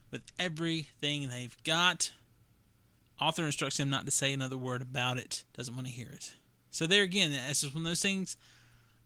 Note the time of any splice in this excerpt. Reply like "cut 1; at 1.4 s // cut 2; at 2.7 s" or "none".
cut 1; at 5.5 s